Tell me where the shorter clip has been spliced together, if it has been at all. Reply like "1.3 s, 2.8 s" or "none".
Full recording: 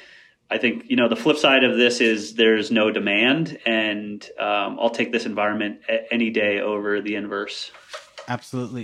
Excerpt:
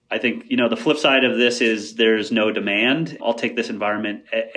3.2 s